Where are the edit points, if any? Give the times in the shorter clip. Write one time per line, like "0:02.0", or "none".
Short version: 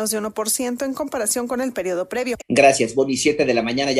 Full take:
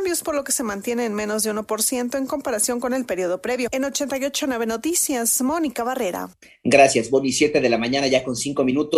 0:02.4